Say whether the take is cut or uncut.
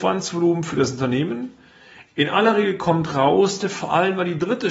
cut